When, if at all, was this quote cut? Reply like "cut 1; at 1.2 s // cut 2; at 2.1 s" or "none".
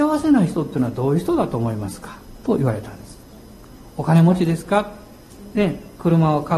none